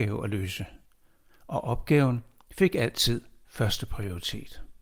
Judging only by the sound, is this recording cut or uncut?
uncut